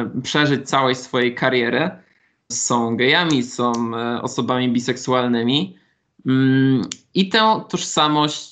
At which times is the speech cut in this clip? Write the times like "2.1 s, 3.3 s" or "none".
2.5 s